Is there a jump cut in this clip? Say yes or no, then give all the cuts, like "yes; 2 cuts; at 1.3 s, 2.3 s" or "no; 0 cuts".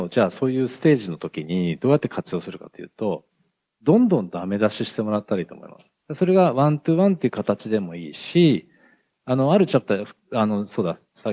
yes; 1 cut; at 6.0 s